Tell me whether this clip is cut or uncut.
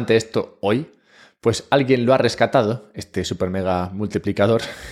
uncut